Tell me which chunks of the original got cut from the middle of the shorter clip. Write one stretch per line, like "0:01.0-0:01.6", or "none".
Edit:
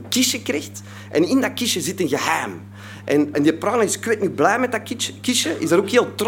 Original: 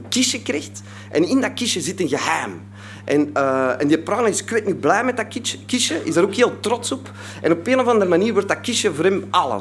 0:03.3-0:03.8